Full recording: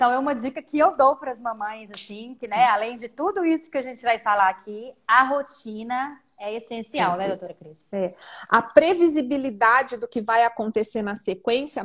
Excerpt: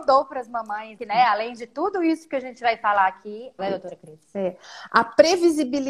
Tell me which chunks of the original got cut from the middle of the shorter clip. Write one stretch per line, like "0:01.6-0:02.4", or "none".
0:01.9-0:02.4
0:05.0-0:07.2